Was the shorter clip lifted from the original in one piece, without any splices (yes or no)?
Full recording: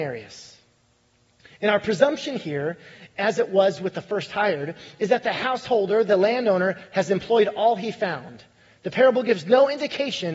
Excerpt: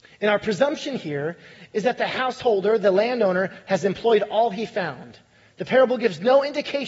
no